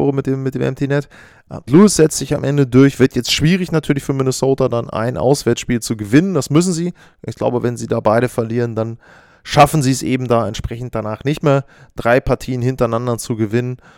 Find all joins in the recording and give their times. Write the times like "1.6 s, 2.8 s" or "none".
1.7 s

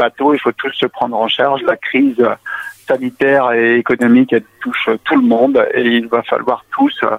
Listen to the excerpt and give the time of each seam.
none

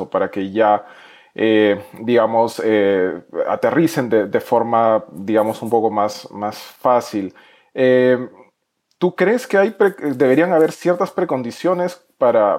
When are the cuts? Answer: none

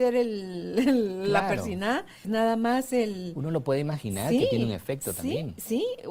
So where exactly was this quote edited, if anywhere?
2.2 s

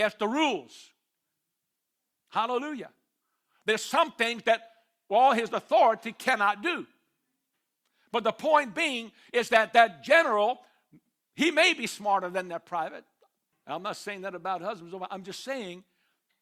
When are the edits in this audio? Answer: 13.5 s

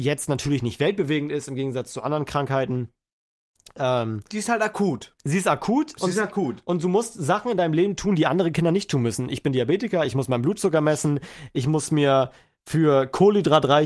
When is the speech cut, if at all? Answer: none

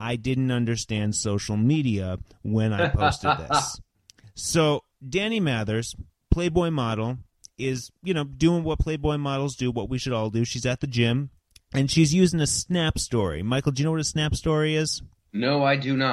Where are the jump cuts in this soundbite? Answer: none

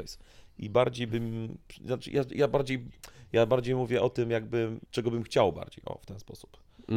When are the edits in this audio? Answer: 4.9 s

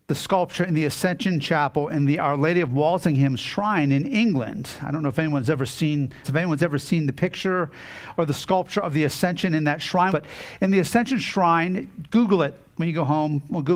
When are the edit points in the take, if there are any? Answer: 6.2 s, 10.1 s

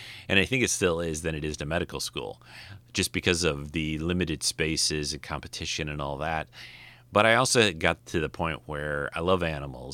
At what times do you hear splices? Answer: 8.0 s

